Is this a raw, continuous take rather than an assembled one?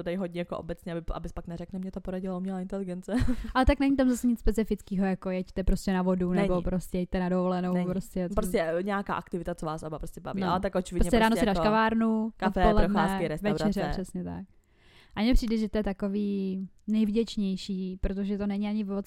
yes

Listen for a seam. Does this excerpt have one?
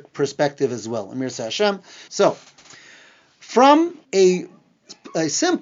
yes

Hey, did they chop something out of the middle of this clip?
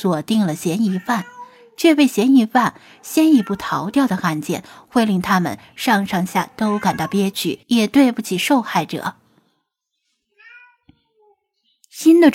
yes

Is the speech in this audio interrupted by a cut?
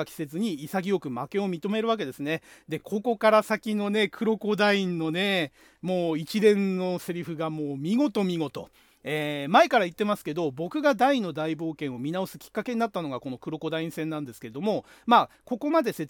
no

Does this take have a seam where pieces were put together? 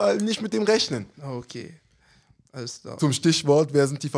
no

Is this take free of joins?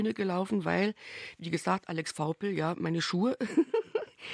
yes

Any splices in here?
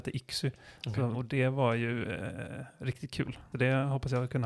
yes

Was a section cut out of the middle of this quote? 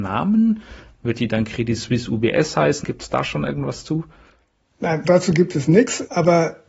yes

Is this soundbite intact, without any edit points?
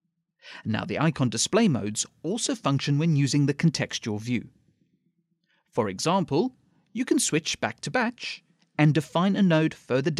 yes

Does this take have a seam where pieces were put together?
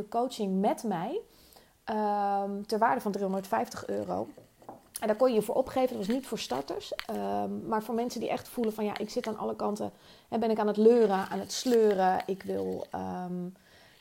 no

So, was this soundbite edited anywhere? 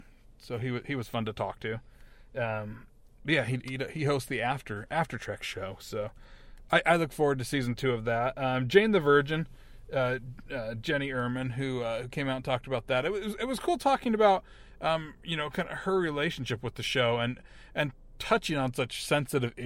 no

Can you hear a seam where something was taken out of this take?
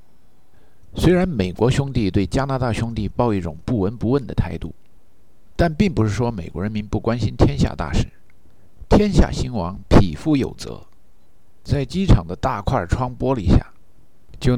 no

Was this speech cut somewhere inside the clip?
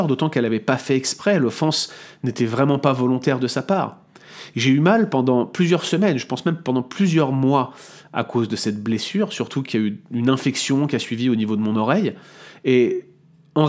no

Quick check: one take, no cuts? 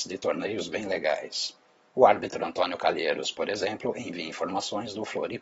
yes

